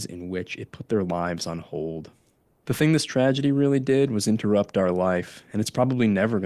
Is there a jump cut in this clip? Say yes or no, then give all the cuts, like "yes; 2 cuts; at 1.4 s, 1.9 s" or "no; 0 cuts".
no; 0 cuts